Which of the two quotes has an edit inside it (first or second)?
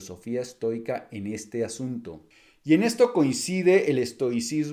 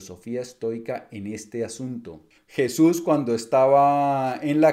second